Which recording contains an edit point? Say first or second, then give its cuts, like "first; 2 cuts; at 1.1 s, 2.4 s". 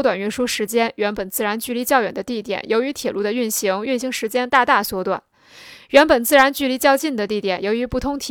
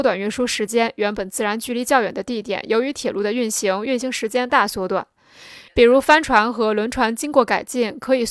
second; 2 cuts; at 4.5 s, 5.7 s